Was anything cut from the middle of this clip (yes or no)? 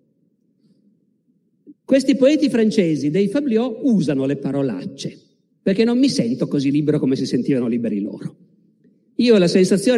yes